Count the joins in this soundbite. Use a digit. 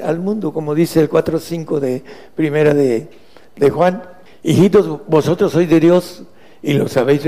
0